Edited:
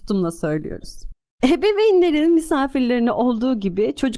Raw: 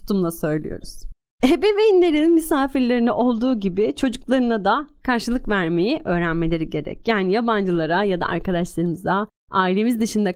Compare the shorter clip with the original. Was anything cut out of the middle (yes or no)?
no